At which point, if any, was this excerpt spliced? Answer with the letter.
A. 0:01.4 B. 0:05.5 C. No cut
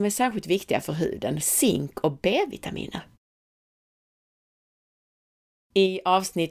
A